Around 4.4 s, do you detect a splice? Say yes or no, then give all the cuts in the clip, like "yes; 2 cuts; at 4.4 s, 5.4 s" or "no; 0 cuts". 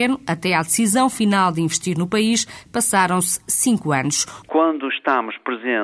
yes; 1 cut; at 4.4 s